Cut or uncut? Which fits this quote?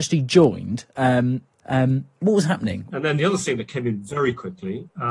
cut